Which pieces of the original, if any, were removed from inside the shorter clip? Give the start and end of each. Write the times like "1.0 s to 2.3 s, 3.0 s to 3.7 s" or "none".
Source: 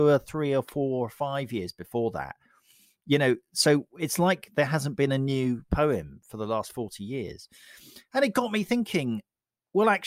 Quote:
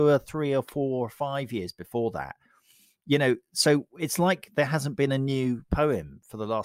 none